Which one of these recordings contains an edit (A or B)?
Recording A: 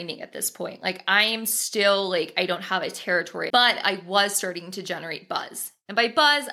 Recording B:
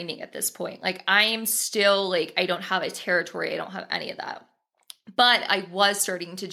A